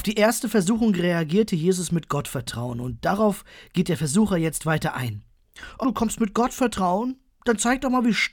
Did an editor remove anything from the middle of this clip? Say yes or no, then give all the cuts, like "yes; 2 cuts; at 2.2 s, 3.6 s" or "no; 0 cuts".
yes; 1 cut; at 5.8 s